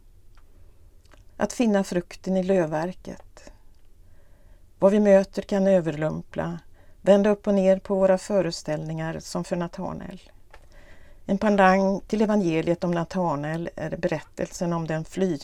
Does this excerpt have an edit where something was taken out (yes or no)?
yes